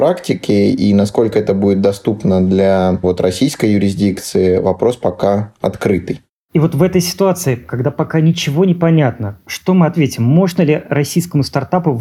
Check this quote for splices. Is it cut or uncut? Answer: uncut